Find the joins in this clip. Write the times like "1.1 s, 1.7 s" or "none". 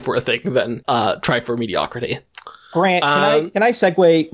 none